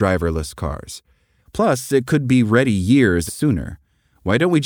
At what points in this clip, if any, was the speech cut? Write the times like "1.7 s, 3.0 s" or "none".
1.4 s, 3.3 s